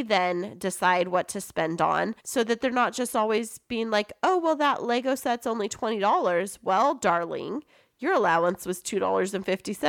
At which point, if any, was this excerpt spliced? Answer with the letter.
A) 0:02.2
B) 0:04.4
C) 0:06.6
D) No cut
A